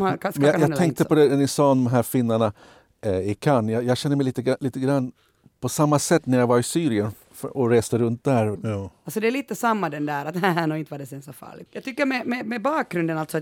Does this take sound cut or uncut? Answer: cut